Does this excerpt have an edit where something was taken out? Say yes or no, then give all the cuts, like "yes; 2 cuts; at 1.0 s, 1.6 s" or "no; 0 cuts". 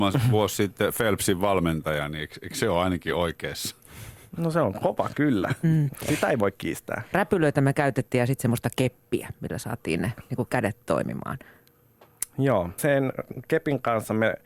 yes; 3 cuts; at 4.8 s, 7.1 s, 12.8 s